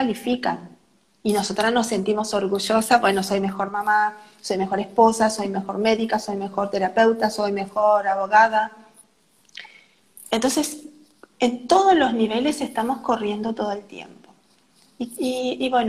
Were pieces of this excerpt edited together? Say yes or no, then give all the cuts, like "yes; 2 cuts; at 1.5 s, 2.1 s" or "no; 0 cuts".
no; 0 cuts